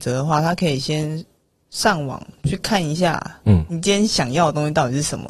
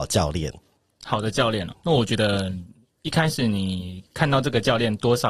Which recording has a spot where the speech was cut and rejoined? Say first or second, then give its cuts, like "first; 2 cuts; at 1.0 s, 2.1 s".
second; 1 cut; at 1.7 s